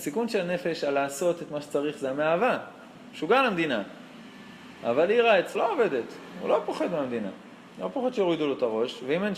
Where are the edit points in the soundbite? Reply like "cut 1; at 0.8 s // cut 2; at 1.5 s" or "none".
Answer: cut 1; at 5.5 s